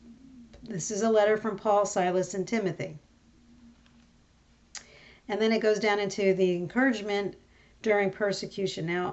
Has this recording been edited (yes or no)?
no